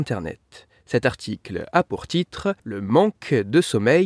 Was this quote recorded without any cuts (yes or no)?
no